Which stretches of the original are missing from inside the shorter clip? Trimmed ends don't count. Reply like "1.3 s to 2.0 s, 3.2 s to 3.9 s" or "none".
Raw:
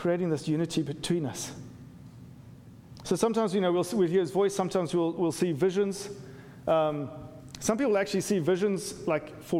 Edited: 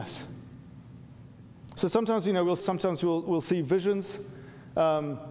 3.9 s to 4.5 s

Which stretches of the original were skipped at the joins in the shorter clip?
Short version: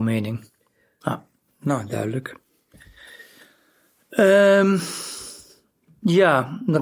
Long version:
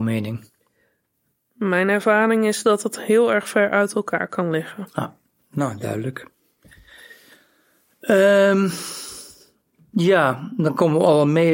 1.0 s to 4.9 s

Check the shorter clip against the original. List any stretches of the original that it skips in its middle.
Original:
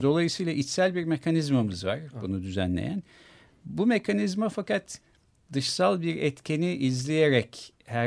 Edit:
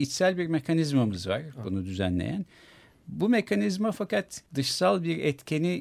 5.0 s to 5.4 s

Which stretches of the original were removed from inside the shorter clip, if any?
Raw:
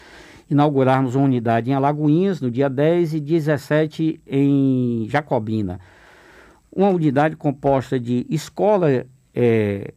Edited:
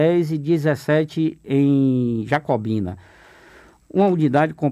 none

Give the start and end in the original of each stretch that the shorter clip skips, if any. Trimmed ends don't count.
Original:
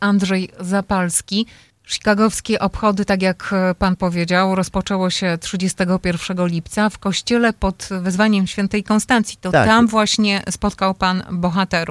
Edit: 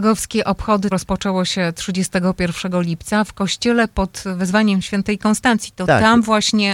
3.1 s to 4.6 s

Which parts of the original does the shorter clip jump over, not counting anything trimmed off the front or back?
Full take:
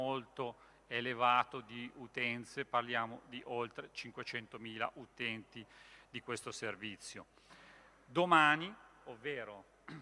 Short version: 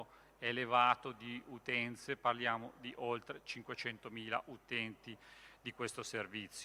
none

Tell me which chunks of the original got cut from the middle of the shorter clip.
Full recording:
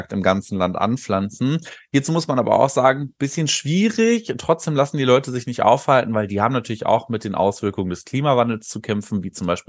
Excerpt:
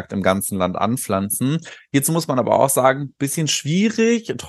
none

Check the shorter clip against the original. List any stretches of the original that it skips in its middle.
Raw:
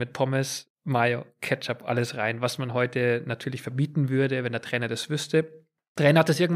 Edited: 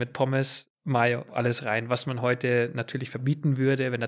1.3 s to 1.8 s

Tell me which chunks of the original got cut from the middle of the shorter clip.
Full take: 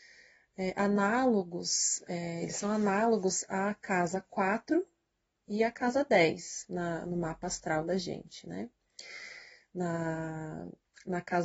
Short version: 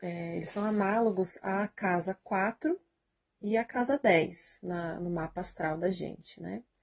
none

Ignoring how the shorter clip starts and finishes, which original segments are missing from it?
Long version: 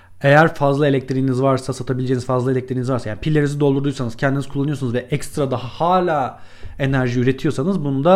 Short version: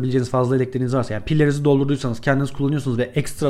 none

